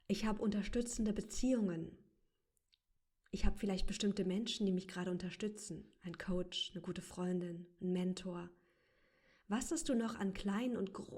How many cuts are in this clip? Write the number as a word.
zero